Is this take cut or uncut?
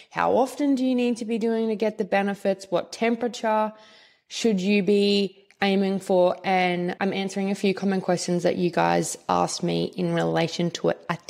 uncut